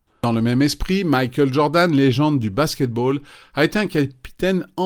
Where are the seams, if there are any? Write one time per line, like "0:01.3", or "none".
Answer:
none